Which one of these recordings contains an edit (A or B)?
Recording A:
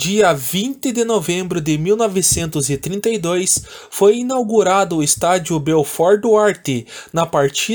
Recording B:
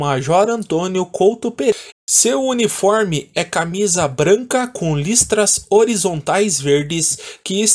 B